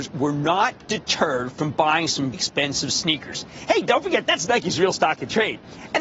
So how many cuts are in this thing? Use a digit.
1